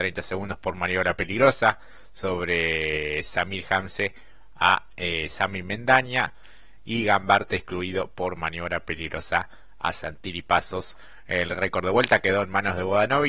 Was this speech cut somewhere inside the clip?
yes; 1 cut; at 6.8 s

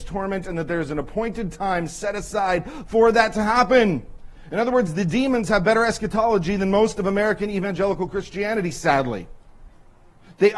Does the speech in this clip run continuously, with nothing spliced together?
yes; 0 cuts

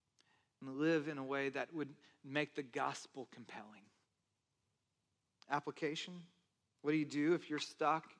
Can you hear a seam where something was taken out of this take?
no; 0 cuts

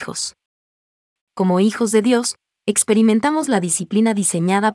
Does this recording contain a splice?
yes; 1 cut; at 1.2 s

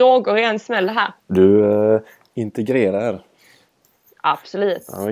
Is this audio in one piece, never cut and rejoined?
yes; 0 cuts

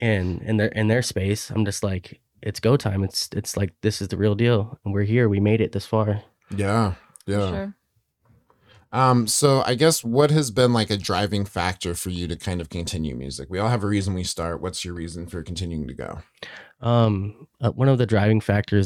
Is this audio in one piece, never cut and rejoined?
yes; 0 cuts

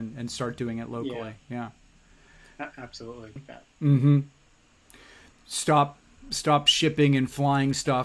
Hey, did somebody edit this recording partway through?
yes; 1 cut; at 3.4 s

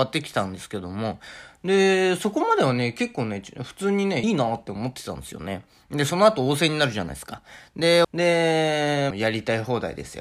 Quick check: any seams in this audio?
yes; 3 cuts; at 4.2 s, 8.0 s, 9.1 s

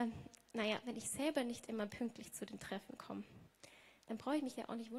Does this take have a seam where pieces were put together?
no; 0 cuts

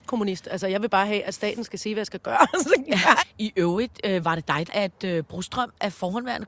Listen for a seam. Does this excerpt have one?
yes; 2 cuts; at 3.2 s, 4.7 s

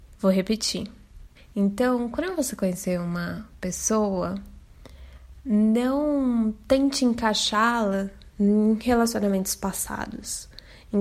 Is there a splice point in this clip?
yes; 1 cut; at 1.4 s

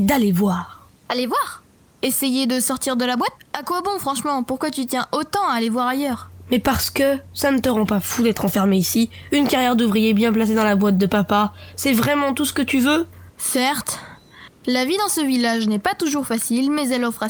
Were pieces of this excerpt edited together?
yes; 1 cut; at 3.3 s

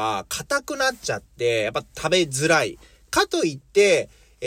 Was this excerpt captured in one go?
yes; 0 cuts

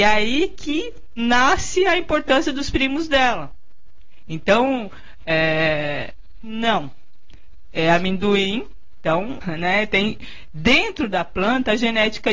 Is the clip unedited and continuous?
no; 2 cuts; at 6.4 s, 9.4 s

